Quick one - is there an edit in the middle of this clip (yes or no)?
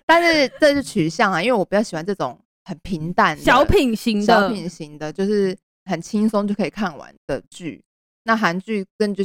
yes